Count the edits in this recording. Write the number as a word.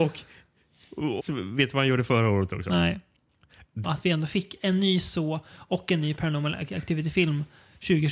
two